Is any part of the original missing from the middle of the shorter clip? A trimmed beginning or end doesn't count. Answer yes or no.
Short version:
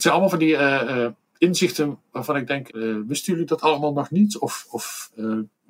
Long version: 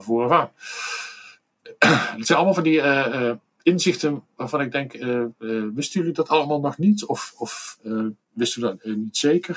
yes